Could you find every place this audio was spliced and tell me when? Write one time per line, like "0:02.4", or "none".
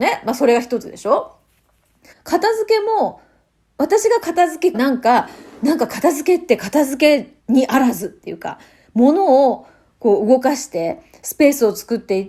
0:02.1
0:04.7
0:07.4